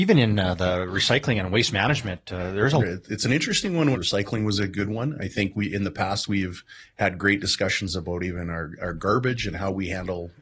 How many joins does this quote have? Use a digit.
2